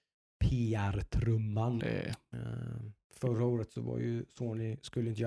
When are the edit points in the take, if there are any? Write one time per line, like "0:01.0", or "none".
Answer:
0:01.8
0:03.0